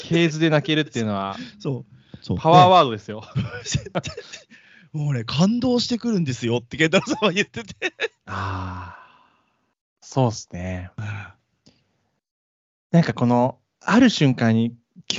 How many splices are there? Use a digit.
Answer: 2